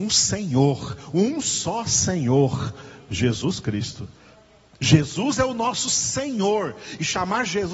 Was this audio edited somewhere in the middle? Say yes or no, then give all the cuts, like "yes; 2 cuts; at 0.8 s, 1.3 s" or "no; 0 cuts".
no; 0 cuts